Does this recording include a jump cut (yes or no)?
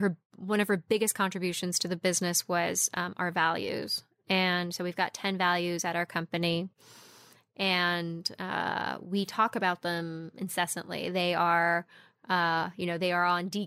no